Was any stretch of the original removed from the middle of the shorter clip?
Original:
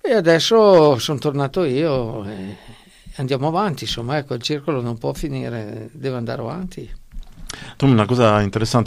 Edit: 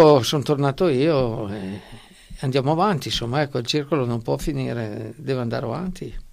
no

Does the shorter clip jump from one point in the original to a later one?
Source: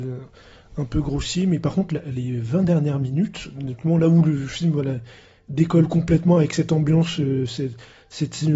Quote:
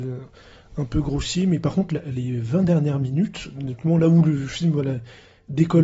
no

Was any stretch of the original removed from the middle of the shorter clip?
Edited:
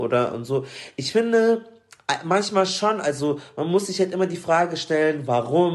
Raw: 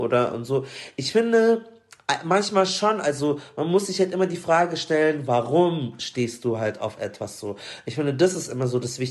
no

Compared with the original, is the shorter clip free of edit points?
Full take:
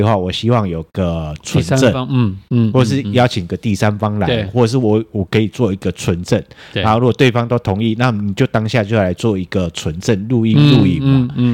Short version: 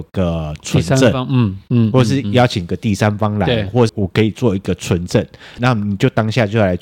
no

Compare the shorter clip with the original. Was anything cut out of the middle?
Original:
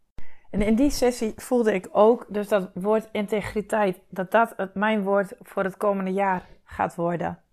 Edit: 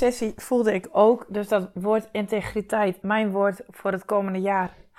yes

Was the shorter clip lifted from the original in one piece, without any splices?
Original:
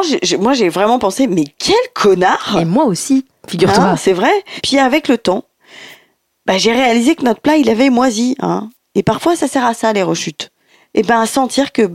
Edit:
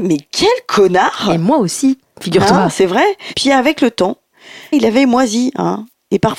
no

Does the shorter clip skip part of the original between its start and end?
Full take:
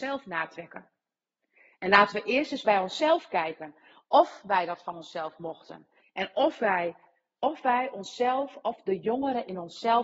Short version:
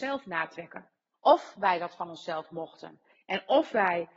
yes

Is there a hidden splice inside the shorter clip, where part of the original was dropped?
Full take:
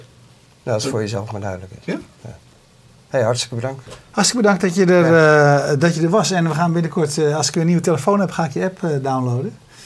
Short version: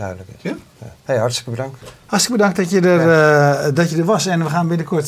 yes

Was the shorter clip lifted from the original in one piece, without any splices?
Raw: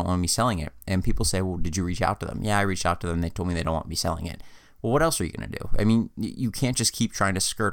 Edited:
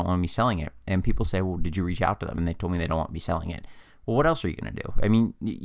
no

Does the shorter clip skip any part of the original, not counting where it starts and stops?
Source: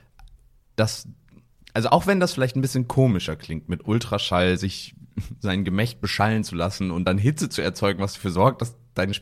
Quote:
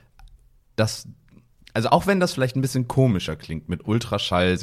no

